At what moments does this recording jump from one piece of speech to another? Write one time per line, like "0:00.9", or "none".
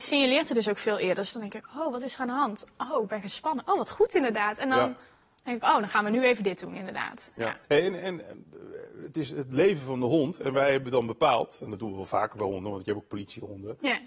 0:07.6